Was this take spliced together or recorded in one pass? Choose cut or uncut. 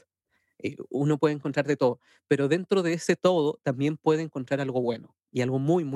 uncut